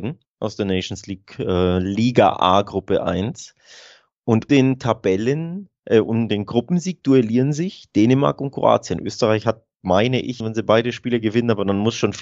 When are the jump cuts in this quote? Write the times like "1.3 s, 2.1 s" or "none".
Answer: 4.5 s, 10.4 s